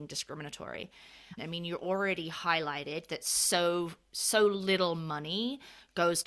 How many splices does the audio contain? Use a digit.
1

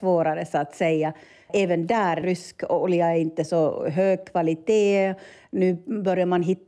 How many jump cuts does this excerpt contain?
1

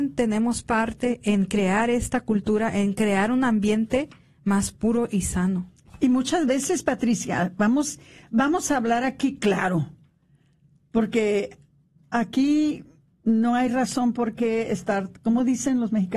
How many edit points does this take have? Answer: 0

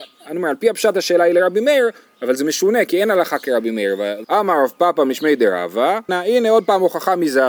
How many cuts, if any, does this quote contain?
2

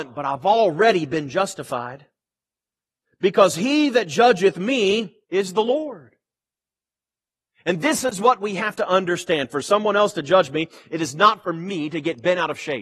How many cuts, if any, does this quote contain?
1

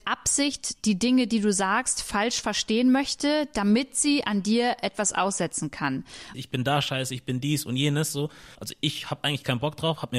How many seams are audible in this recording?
2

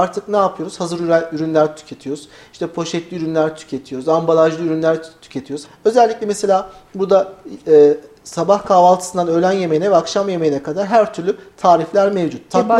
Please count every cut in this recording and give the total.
1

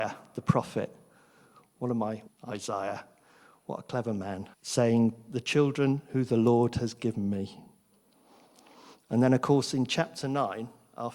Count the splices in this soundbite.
2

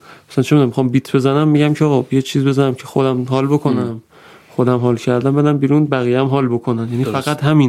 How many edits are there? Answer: 0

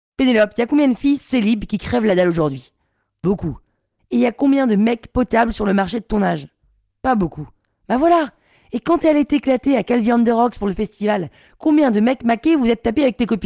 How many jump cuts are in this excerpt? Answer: 0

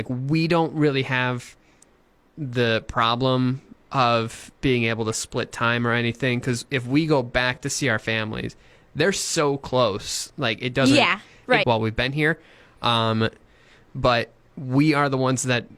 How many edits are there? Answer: 1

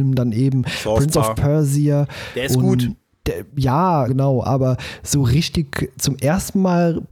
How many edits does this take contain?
1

